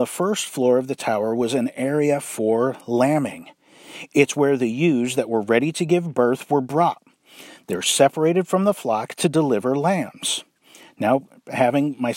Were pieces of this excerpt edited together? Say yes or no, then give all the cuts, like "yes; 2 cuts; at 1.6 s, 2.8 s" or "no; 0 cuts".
no; 0 cuts